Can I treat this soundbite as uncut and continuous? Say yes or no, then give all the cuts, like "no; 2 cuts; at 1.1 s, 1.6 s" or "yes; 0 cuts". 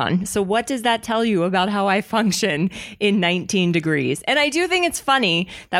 yes; 0 cuts